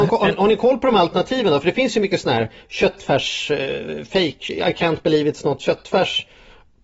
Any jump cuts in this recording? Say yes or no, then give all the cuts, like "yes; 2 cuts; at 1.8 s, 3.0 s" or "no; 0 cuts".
no; 0 cuts